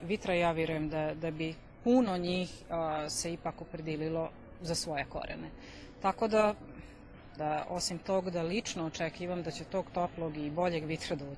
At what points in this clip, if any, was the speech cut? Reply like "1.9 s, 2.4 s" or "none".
7.4 s